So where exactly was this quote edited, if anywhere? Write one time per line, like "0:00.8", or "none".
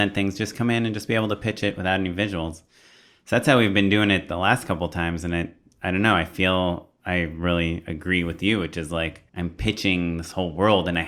0:09.3